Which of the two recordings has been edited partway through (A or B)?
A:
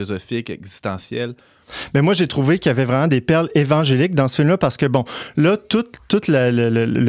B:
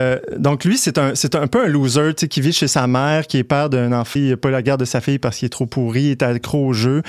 B